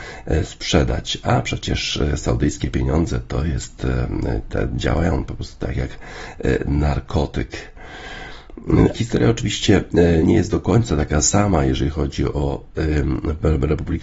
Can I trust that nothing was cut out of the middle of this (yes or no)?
no